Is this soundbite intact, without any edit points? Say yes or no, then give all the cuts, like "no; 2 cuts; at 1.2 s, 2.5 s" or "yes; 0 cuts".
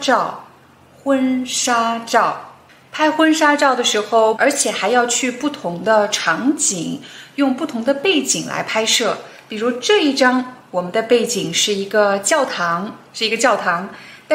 no; 1 cut; at 4.4 s